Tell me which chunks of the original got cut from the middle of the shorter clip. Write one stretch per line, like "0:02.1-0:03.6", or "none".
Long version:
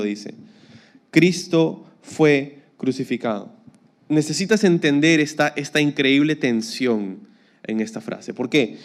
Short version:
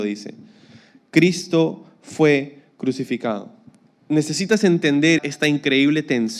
0:05.2-0:05.5